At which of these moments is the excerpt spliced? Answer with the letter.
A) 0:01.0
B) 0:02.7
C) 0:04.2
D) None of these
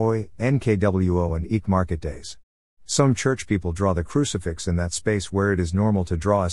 B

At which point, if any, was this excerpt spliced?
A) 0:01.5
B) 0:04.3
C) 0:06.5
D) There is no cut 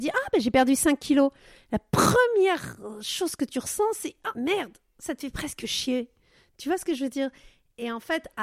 B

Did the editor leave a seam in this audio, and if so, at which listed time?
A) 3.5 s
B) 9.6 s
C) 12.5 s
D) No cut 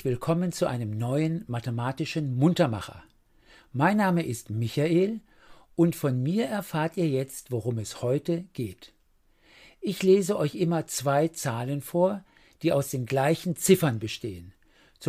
D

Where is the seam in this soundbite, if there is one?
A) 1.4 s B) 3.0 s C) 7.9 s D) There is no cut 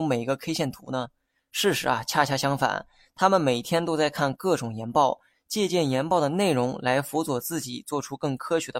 D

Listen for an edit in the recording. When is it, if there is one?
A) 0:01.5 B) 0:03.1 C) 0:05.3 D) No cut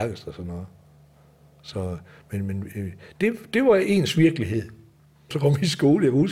C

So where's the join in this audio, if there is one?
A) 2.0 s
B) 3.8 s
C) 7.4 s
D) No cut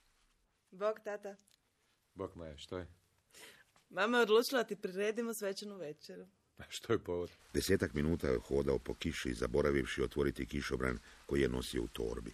C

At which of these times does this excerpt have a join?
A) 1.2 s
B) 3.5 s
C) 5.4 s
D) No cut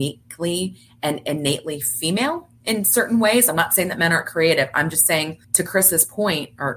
C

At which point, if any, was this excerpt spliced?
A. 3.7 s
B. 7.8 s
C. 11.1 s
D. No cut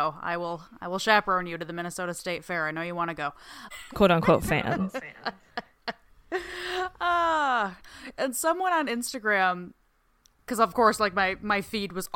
A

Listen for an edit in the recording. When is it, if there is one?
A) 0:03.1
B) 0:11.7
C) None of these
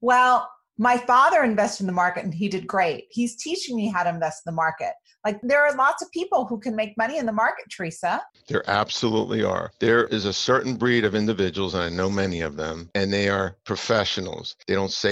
A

